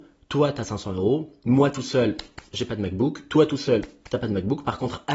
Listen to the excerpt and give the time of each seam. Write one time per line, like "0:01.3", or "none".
none